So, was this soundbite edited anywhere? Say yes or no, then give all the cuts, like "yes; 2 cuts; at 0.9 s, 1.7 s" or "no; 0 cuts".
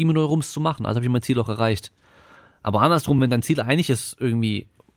no; 0 cuts